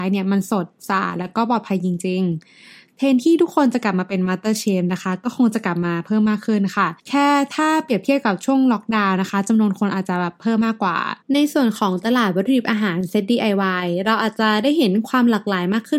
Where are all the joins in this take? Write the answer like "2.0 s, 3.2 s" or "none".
7.0 s, 11.2 s